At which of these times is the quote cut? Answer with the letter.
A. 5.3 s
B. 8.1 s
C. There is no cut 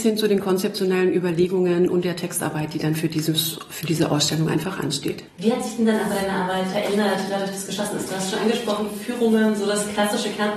A